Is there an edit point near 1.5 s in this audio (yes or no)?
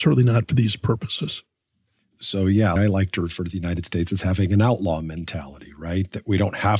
no